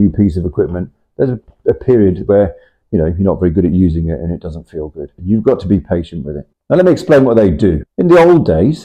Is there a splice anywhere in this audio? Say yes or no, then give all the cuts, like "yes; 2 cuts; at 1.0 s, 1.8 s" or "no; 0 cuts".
yes; 1 cut; at 5.2 s